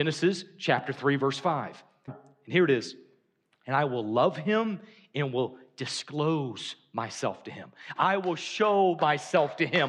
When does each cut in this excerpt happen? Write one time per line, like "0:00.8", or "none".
0:02.1
0:08.0